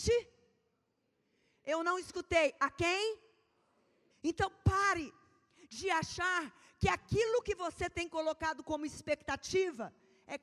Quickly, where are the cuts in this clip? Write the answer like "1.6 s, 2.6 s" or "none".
4.1 s